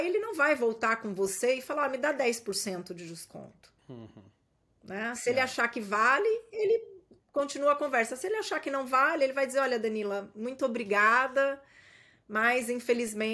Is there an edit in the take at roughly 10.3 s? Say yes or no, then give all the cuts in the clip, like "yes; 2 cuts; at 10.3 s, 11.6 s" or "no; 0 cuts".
no; 1 cut; at 3.8 s